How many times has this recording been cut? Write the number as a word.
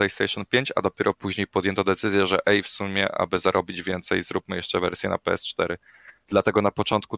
zero